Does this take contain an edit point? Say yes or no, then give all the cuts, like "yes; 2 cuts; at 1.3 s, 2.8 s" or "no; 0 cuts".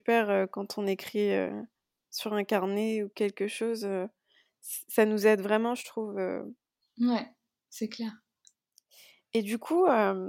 no; 0 cuts